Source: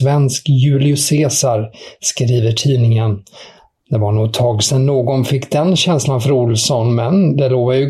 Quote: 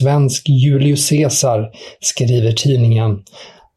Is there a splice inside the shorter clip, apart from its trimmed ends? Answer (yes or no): no